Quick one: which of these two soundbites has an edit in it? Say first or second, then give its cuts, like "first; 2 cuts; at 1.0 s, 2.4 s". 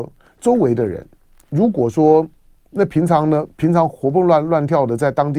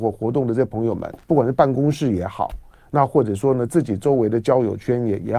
second; 2 cuts; at 1.2 s, 3.7 s